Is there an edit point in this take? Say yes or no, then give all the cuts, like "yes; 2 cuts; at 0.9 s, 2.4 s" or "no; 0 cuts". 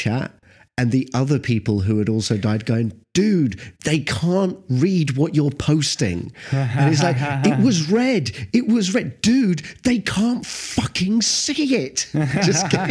no; 0 cuts